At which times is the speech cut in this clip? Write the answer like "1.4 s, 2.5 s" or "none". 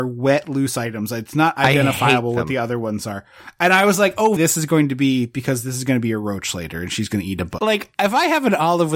4.4 s, 7.6 s